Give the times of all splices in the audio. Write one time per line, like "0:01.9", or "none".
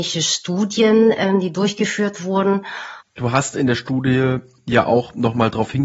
0:03.0